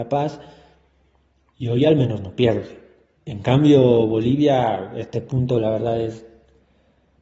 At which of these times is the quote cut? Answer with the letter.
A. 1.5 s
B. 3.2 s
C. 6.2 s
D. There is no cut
B